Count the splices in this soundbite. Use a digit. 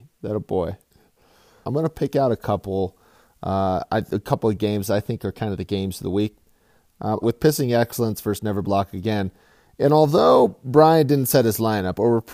2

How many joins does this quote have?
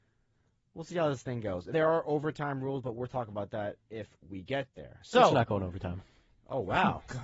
1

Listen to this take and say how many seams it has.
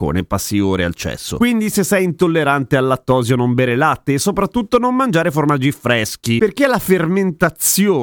1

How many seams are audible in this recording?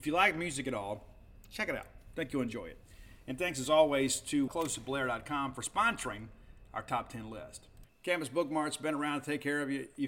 2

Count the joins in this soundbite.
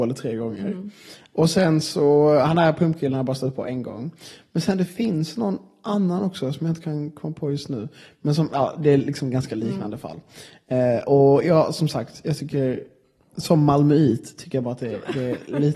0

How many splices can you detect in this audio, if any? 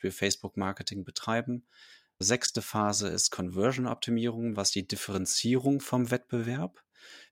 1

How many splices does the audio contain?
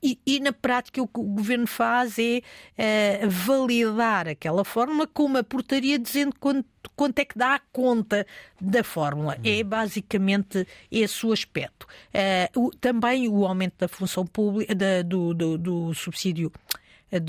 0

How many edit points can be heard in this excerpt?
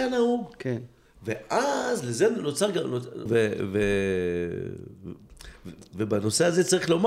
1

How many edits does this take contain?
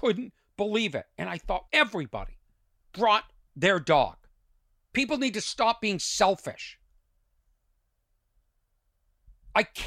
2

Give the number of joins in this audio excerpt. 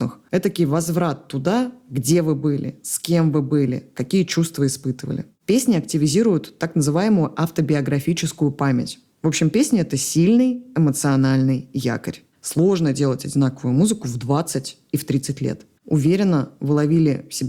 2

